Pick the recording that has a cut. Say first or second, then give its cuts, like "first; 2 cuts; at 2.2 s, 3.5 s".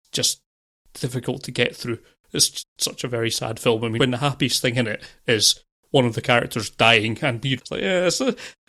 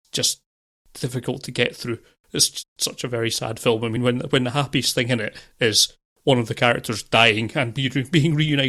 first; 2 cuts; at 4.0 s, 7.6 s